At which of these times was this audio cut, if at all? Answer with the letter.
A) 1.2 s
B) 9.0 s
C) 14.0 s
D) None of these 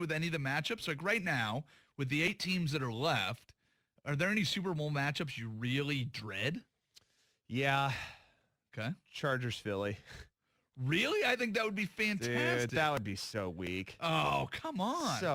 D